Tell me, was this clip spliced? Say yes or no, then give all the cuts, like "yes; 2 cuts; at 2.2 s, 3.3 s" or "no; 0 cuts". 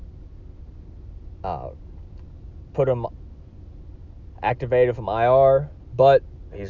no; 0 cuts